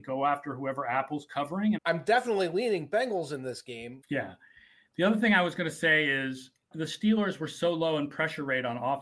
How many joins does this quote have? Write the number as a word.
three